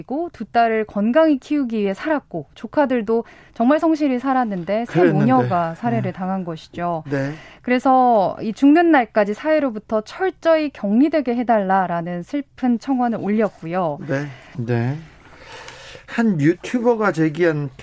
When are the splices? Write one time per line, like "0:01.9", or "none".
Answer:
0:14.5